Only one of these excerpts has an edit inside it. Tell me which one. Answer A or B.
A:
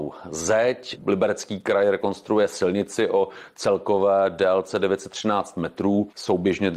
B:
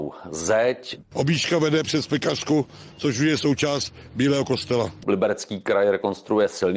B